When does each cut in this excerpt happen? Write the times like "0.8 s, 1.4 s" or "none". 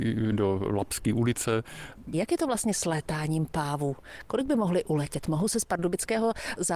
2.1 s